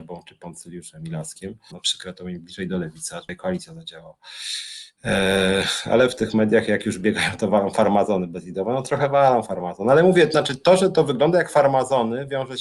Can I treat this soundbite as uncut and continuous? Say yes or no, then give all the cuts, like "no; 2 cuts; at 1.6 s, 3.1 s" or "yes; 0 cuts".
no; 1 cut; at 1.7 s